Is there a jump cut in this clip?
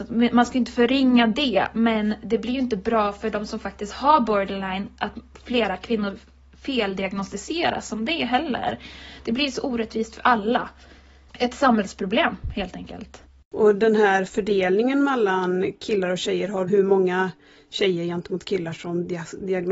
yes; 1 cut; at 16.7 s

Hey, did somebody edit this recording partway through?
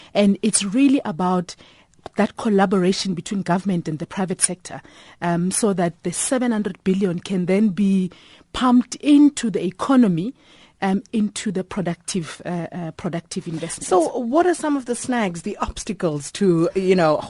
no; 0 cuts

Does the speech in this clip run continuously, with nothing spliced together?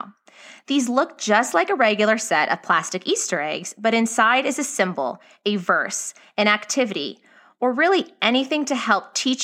yes; 0 cuts

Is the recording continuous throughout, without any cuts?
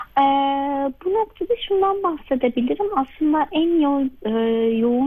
yes; 0 cuts

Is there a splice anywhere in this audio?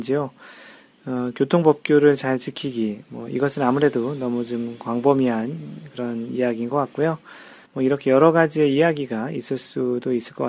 yes; 1 cut; at 7.6 s

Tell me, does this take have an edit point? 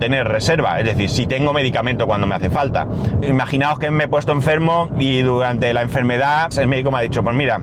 yes; 2 cuts; at 3.2 s, 6.5 s

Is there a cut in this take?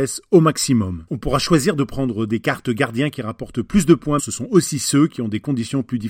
yes; 2 cuts; at 1.1 s, 4.2 s

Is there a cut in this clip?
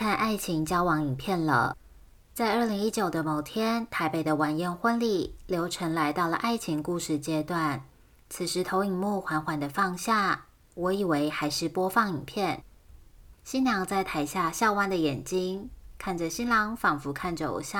yes; 1 cut; at 13.3 s

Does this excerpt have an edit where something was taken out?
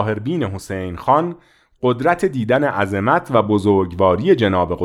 no; 0 cuts

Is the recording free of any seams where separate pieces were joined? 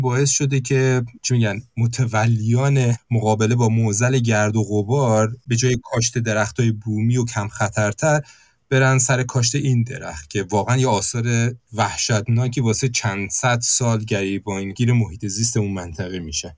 no; 1 cut; at 1.2 s

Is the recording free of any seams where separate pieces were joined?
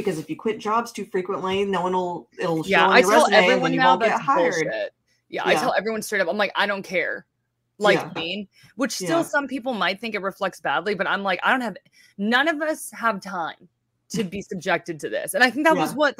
no; 1 cut; at 8.2 s

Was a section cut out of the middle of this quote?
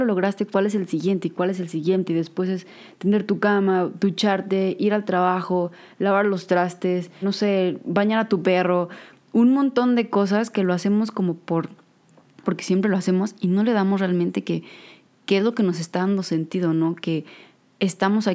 yes; 2 cuts; at 7.2 s, 12.4 s

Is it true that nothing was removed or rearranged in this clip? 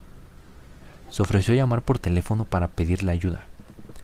yes; 0 cuts

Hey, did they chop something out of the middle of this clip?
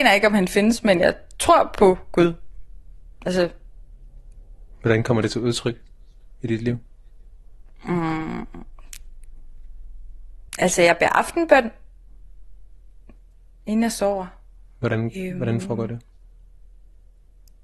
yes; 1 cut; at 10.5 s

